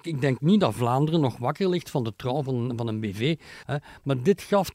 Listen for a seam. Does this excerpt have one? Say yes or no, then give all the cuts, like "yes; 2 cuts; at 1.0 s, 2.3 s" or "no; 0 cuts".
yes; 1 cut; at 3.6 s